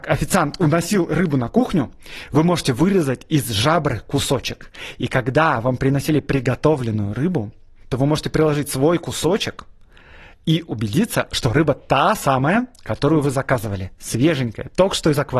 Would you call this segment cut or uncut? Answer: uncut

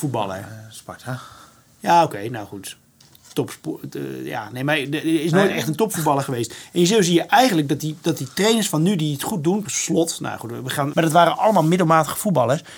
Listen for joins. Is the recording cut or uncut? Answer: cut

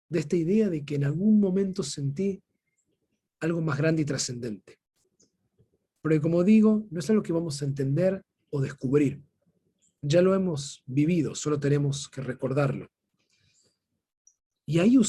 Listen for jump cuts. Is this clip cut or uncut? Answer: uncut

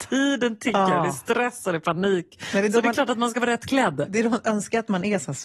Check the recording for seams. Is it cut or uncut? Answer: uncut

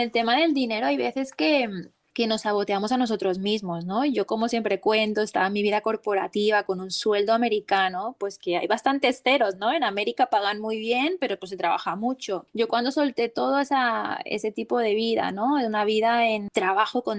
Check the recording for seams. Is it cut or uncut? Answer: uncut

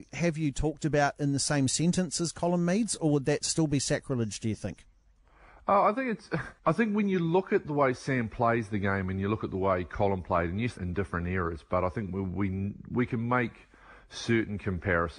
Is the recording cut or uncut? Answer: cut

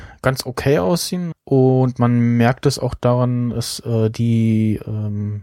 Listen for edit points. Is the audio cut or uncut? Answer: cut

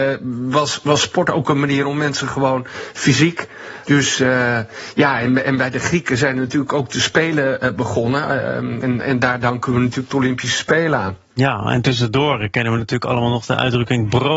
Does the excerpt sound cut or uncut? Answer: cut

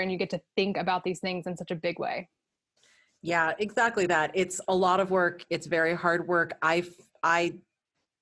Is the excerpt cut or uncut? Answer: uncut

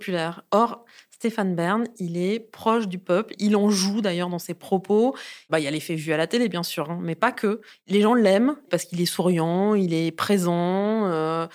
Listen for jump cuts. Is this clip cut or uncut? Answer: uncut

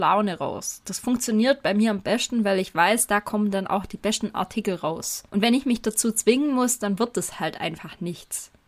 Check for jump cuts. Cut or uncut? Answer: cut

